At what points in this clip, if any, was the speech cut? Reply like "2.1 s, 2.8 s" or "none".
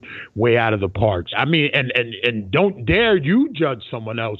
1.3 s